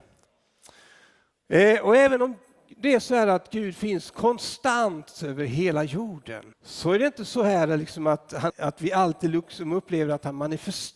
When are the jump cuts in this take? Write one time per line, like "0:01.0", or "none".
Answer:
0:06.5
0:08.5